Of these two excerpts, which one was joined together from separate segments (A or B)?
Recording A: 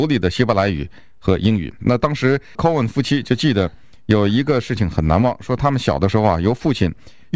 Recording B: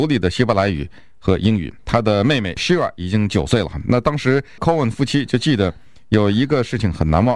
A